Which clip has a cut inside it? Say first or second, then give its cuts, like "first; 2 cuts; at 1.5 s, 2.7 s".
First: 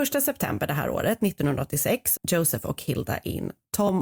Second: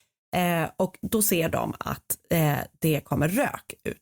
first; 1 cut; at 2.2 s